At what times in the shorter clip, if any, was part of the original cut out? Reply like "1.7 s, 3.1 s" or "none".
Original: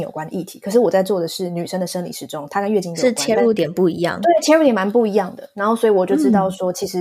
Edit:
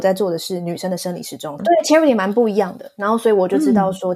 1.6 s

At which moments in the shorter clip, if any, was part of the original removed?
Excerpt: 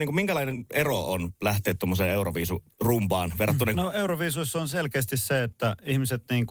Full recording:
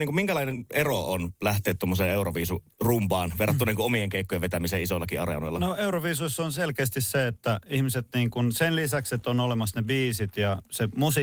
3.7 s

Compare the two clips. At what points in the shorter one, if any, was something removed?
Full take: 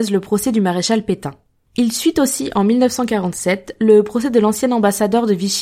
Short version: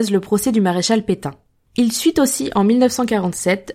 none

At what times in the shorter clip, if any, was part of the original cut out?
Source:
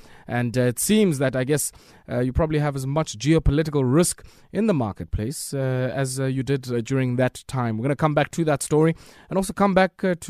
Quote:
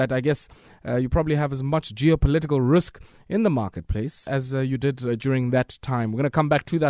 4.3 s

